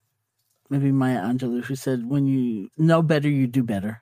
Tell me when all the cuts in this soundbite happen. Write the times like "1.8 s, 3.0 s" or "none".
none